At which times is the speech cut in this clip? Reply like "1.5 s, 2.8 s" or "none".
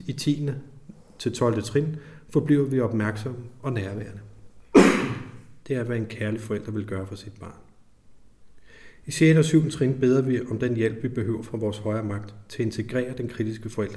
5.6 s